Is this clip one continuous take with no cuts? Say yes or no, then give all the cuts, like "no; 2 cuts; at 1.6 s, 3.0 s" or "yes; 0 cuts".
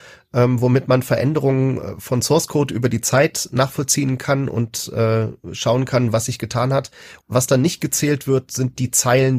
no; 1 cut; at 7.2 s